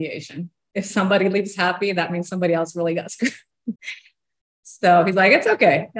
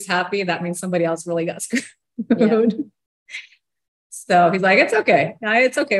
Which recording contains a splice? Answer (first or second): first